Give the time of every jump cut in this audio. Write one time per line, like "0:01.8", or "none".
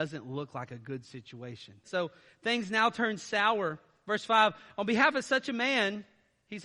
0:01.8